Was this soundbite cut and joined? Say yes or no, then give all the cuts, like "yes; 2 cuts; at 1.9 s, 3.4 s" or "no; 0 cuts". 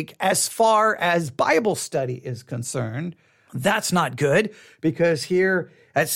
yes; 1 cut; at 3.5 s